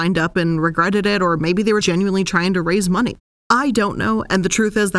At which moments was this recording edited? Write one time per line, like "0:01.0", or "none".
0:01.8